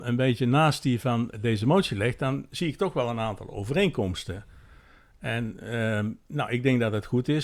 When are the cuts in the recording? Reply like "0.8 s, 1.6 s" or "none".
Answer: 1.3 s